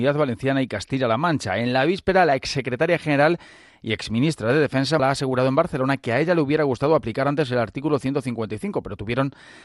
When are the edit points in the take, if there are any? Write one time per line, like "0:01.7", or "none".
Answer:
0:05.0